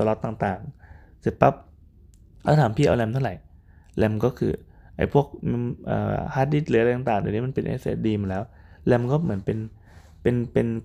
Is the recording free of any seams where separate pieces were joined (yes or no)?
yes